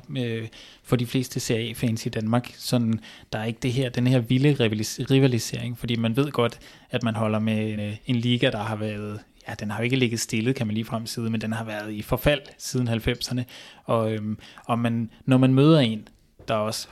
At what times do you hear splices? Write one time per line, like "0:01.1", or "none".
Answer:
0:07.8